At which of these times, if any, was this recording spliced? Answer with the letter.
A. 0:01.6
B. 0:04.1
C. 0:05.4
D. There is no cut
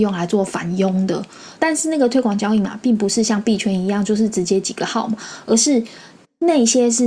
A